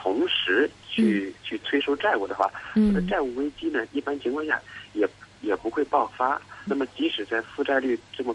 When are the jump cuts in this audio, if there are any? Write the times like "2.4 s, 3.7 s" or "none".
6.7 s